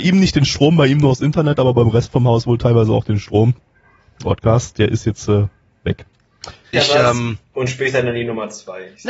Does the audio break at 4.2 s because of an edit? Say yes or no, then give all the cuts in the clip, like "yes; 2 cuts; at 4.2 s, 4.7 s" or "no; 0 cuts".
yes; 2 cuts; at 4.2 s, 6.7 s